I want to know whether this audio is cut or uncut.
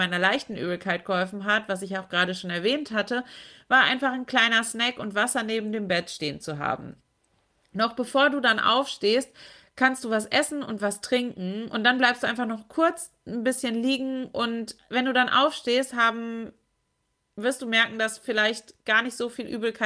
uncut